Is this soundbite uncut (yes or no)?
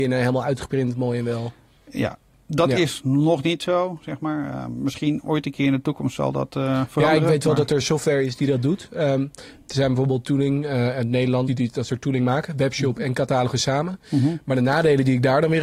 no